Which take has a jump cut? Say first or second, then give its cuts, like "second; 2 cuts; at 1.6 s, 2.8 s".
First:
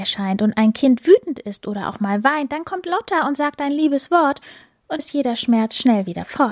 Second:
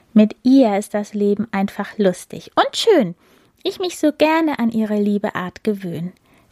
first; 1 cut; at 5.0 s